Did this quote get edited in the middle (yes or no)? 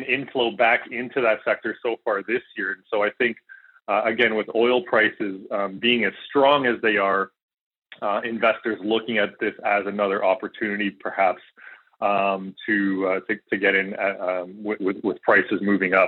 no